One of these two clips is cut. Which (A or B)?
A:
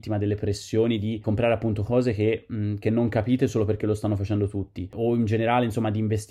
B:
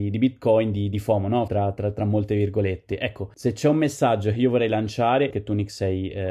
B